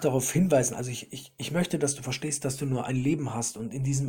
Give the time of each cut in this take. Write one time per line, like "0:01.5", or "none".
none